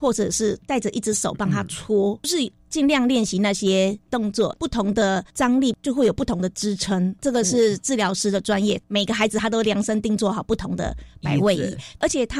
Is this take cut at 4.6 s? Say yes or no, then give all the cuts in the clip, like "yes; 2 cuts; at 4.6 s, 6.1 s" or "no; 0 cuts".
yes; 1 cut; at 4.6 s